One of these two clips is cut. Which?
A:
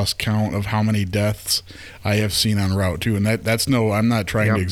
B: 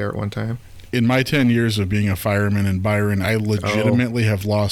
B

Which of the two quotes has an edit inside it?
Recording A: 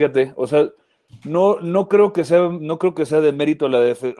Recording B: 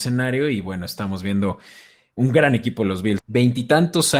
B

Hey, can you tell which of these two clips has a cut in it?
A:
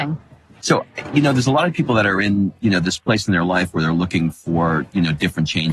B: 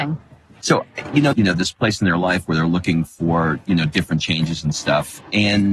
B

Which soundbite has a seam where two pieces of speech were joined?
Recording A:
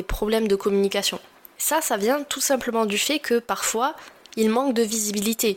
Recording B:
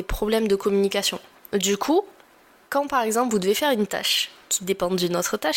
B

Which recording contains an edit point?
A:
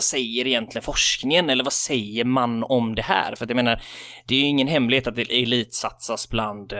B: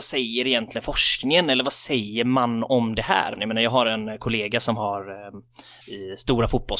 B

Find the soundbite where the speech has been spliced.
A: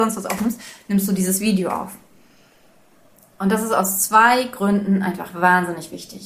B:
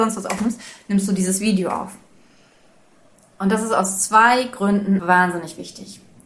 B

